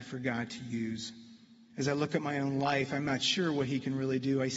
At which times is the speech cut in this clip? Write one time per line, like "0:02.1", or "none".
0:01.7